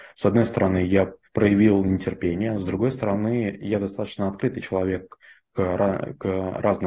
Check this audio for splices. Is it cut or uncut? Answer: cut